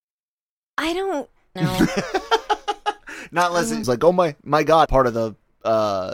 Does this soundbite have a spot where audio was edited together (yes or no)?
yes